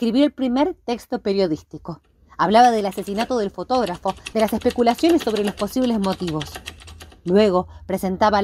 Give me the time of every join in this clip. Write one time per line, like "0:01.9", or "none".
0:04.3